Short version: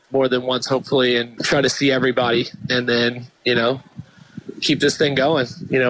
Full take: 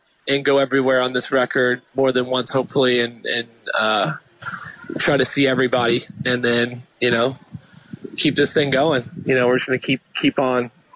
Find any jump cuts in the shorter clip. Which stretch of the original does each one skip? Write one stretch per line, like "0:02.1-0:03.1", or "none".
0:03.2-0:04.9